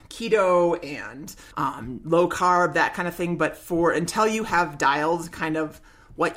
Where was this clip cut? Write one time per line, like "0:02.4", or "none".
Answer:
0:01.5